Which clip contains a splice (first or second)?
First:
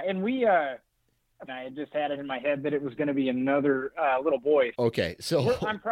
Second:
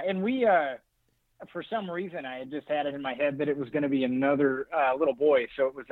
first